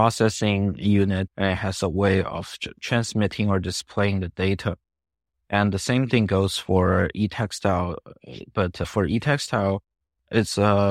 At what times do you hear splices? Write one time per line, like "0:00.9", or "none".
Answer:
0:01.3

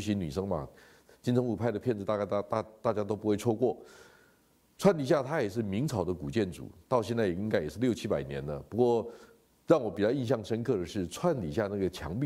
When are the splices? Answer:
none

